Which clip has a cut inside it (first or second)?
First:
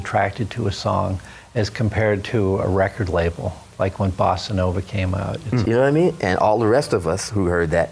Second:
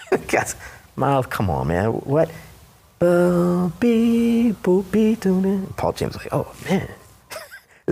first